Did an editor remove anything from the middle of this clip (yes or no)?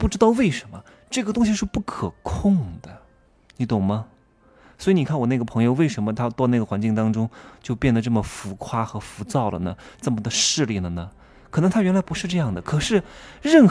no